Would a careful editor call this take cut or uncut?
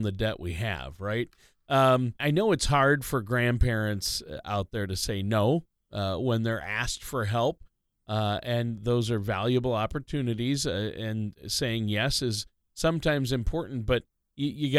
cut